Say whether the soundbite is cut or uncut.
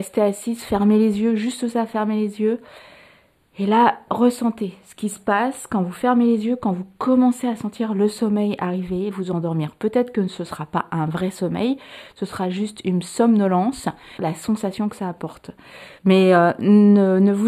cut